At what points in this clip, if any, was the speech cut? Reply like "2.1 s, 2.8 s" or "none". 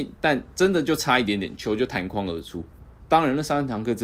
3.0 s